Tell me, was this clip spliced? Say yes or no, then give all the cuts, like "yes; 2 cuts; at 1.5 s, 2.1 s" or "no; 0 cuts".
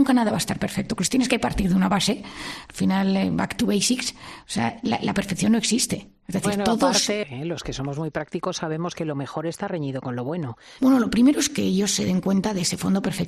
yes; 2 cuts; at 7.2 s, 10.8 s